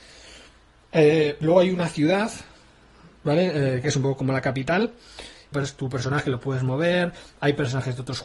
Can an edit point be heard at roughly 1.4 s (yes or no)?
no